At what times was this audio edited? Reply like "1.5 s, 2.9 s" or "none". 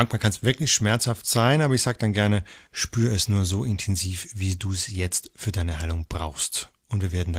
none